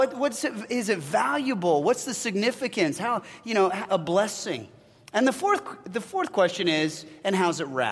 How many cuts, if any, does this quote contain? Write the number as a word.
one